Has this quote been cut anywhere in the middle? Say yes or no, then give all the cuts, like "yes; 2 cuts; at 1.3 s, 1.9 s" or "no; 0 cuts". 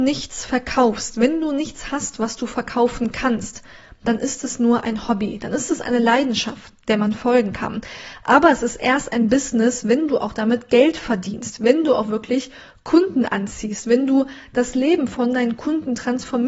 no; 0 cuts